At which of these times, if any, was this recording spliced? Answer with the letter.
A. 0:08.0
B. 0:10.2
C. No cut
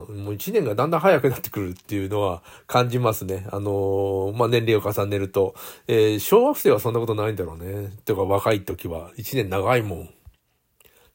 C